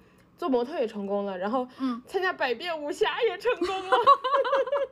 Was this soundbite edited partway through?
no; 0 cuts

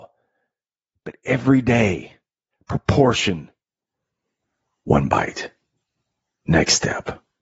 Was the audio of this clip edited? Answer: no; 0 cuts

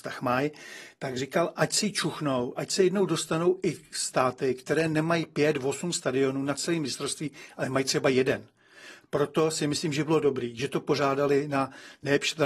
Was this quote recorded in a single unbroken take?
yes; 0 cuts

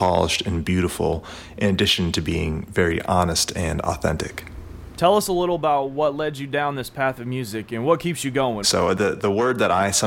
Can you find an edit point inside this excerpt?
yes; 1 cut; at 8.6 s

